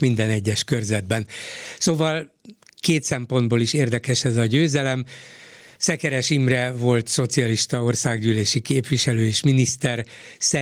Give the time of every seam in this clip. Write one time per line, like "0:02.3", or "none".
none